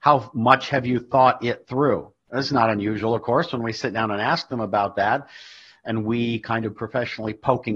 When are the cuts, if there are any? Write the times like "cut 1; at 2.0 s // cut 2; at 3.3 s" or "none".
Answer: none